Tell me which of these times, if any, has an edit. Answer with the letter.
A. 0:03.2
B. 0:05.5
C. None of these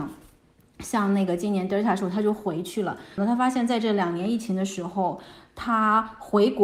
A